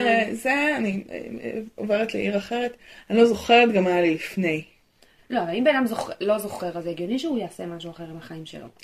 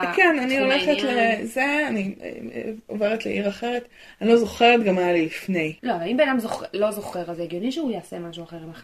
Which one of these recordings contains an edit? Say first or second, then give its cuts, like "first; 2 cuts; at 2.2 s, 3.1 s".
second; 1 cut; at 5.8 s